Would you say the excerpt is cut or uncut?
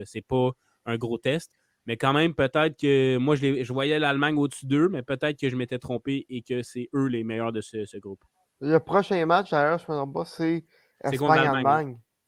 uncut